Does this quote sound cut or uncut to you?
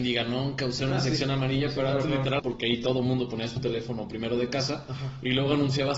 cut